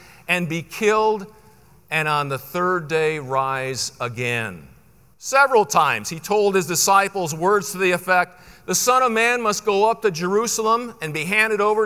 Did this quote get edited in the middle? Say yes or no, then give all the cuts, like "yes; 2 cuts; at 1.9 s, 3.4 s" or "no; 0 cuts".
yes; 1 cut; at 5.1 s